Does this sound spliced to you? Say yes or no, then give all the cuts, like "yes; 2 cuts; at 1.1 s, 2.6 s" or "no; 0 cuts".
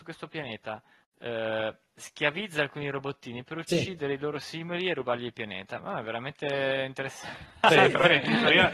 no; 0 cuts